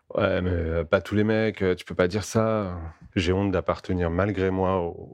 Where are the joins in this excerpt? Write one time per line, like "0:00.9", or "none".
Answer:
0:03.1